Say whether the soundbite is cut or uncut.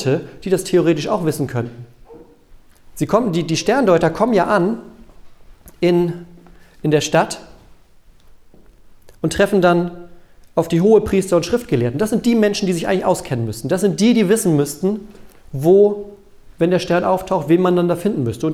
uncut